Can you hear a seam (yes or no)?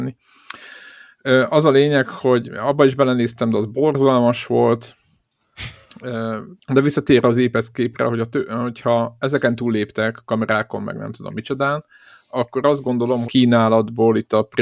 yes